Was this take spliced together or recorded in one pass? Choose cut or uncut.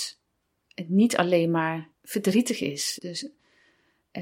cut